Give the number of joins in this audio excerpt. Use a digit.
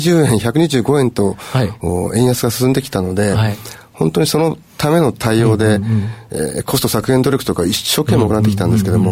0